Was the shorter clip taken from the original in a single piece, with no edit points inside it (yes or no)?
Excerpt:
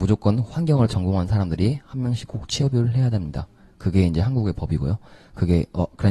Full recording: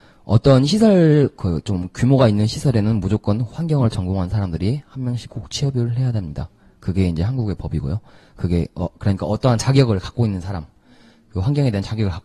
yes